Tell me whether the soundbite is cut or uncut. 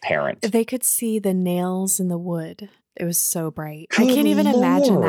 uncut